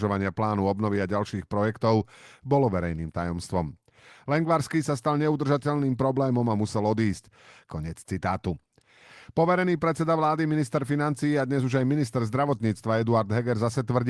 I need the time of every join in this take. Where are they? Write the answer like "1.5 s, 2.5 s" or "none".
7.7 s